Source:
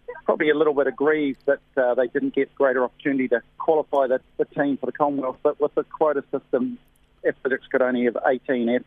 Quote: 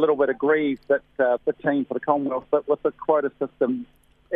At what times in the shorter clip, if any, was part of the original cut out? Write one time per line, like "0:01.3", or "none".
0:01.4